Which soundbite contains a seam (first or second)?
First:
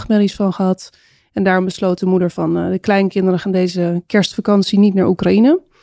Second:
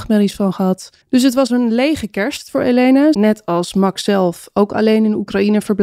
second